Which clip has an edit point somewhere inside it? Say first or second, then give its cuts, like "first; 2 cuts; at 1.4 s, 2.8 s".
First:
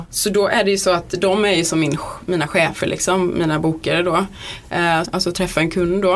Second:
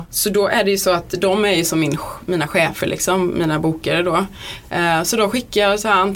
first; 1 cut; at 5.0 s